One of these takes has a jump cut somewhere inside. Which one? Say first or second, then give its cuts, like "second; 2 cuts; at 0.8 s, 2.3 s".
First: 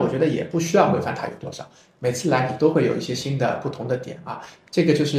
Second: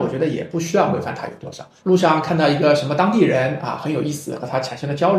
second; 1 cut; at 1.8 s